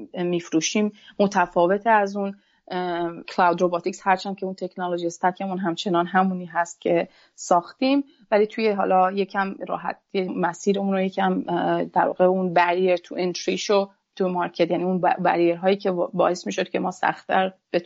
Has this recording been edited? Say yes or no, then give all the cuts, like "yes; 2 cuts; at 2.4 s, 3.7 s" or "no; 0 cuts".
yes; 2 cuts; at 3.2 s, 10.3 s